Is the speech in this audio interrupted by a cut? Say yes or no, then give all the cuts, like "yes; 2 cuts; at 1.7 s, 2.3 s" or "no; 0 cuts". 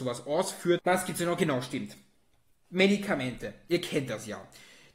no; 0 cuts